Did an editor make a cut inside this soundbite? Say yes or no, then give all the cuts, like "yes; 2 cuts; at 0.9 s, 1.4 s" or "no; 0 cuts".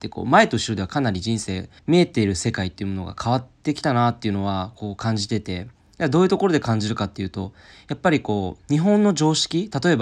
yes; 1 cut; at 1.8 s